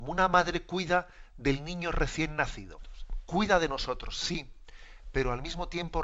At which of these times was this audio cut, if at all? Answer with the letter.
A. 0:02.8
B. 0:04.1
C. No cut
A